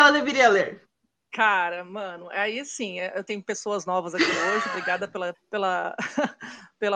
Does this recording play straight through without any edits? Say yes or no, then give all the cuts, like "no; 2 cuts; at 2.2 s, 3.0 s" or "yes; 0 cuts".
no; 2 cuts; at 3.3 s, 5.3 s